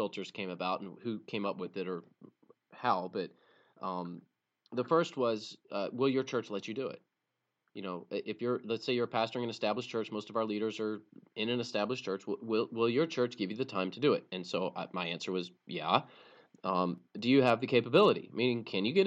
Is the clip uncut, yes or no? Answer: yes